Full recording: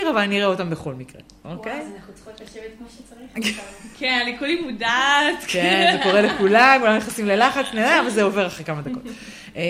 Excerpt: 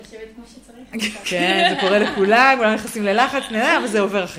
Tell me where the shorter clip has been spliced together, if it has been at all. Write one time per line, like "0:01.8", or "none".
0:01.2